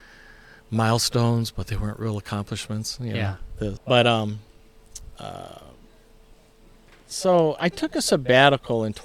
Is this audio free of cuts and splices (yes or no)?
no